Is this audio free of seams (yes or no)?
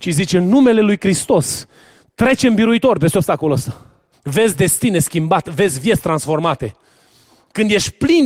no